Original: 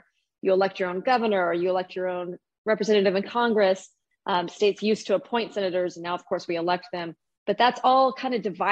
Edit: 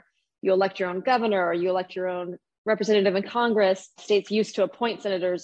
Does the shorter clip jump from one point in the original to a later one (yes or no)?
yes